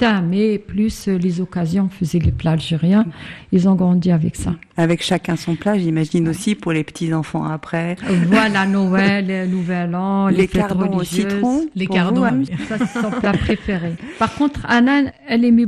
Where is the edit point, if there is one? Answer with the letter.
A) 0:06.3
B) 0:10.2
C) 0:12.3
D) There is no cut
C